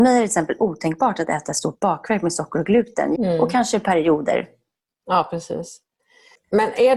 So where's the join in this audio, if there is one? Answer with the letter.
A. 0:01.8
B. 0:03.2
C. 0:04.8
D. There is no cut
B